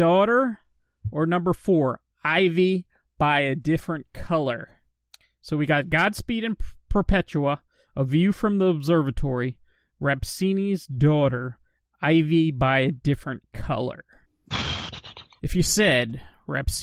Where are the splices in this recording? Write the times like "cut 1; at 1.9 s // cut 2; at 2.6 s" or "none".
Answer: cut 1; at 15.4 s